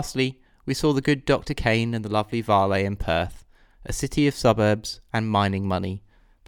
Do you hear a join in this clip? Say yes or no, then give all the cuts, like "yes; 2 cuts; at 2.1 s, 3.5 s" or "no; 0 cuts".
no; 0 cuts